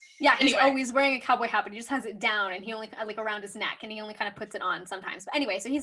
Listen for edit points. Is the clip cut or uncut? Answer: uncut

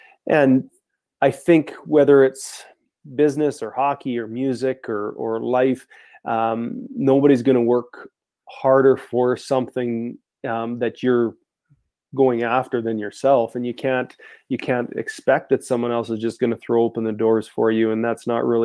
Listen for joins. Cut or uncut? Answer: uncut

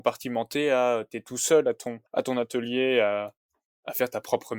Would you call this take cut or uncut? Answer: cut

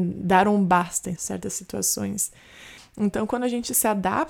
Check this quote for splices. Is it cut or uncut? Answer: cut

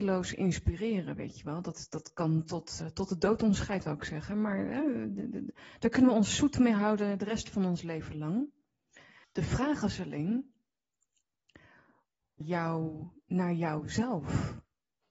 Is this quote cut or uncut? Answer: cut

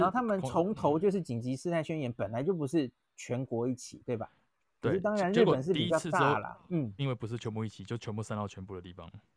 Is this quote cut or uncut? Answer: cut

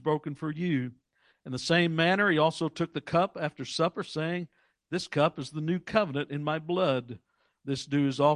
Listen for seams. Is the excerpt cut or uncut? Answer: cut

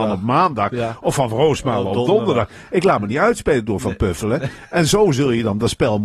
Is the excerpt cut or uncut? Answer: uncut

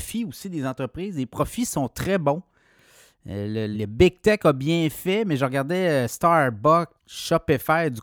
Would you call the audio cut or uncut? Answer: cut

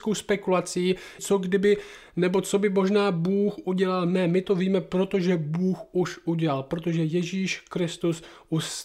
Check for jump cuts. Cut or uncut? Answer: cut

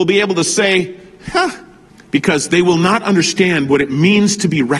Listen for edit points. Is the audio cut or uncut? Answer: cut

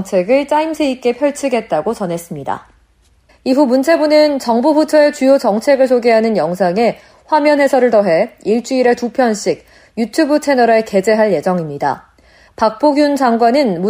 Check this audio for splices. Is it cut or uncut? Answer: cut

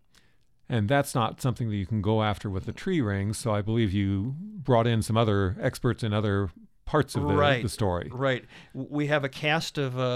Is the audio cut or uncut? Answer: uncut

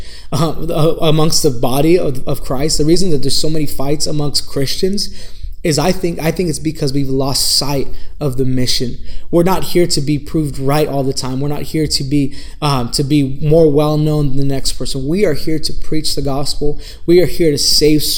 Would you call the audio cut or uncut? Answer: uncut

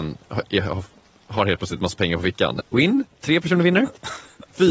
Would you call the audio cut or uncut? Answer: cut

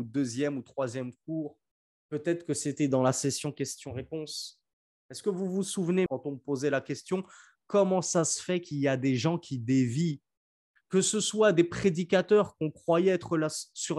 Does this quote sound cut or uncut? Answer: cut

